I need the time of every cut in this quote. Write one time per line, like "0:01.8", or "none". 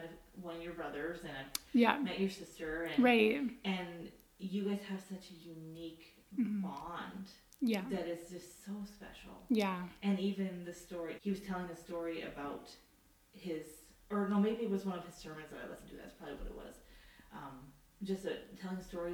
0:11.2